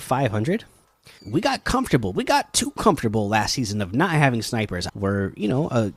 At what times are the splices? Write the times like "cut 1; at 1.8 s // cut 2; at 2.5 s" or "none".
cut 1; at 1.2 s // cut 2; at 4.9 s